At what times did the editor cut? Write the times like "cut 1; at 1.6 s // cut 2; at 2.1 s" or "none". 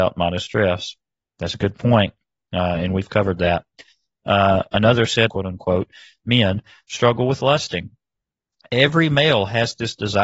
cut 1; at 5.3 s